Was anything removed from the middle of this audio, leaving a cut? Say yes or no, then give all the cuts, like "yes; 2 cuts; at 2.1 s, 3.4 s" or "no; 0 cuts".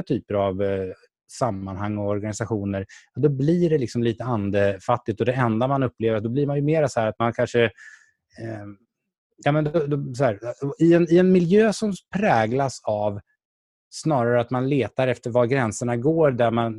no; 0 cuts